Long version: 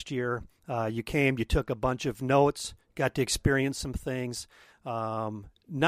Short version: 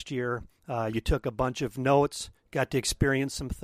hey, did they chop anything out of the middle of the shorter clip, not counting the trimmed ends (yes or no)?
yes